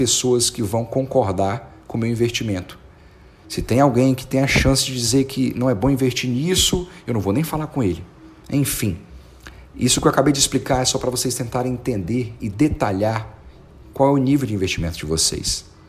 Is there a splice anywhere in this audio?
yes; 1 cut; at 8.4 s

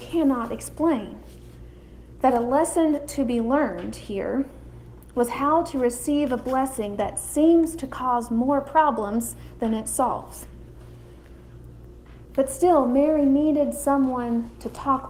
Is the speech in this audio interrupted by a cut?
yes; 2 cuts; at 2.2 s, 12.3 s

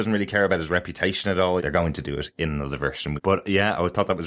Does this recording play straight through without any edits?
no; 2 cuts; at 1.6 s, 3.2 s

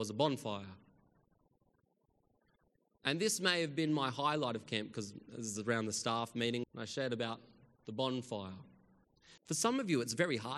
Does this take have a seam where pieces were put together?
yes; 2 cuts; at 6.6 s, 9.4 s

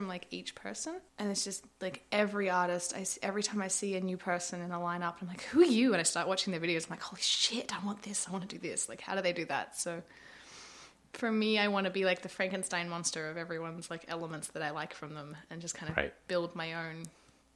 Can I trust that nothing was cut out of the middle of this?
no; 1 cut; at 1.1 s

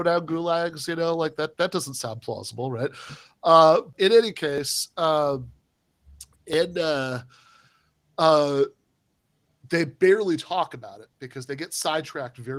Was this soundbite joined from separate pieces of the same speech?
yes; 1 cut; at 3.9 s

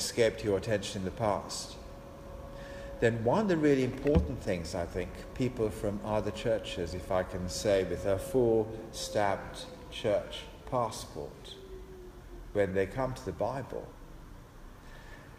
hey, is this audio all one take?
yes; 0 cuts

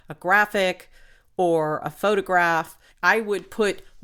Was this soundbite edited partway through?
yes; 1 cut; at 2.9 s

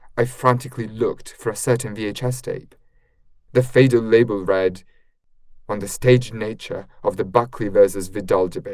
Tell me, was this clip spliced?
yes; 1 cut; at 3.5 s

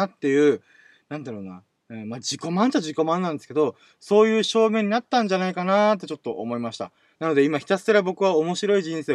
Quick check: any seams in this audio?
yes; 1 cut; at 7.1 s

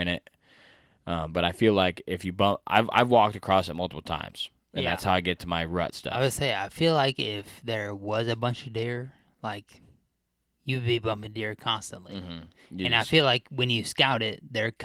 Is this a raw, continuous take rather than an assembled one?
yes; 0 cuts

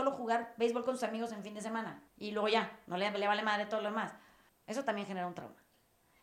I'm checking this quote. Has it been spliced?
yes; 2 cuts; at 2.1 s, 4.5 s

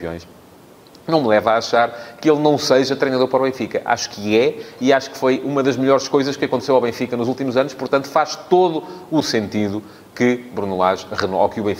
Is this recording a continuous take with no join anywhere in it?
yes; 0 cuts

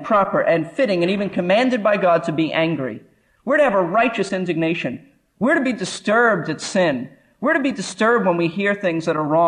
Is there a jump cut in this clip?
no; 0 cuts

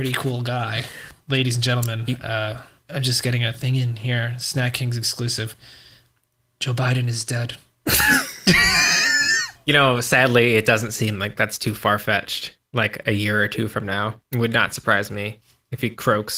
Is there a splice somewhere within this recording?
no; 0 cuts

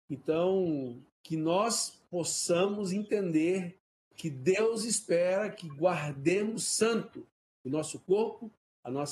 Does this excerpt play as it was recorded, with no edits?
yes; 0 cuts

